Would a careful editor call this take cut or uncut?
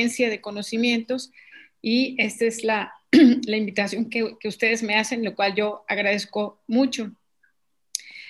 uncut